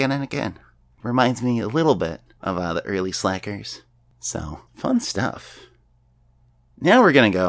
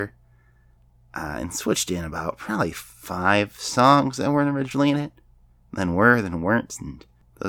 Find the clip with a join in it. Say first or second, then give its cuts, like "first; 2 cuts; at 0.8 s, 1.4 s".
first; 2 cuts; at 1.0 s, 4.7 s